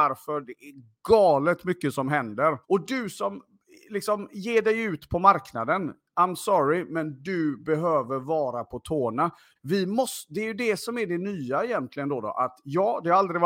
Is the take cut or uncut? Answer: cut